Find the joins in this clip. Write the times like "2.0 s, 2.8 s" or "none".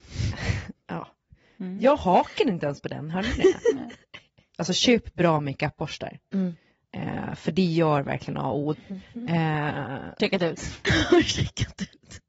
4.5 s, 8.7 s, 10.2 s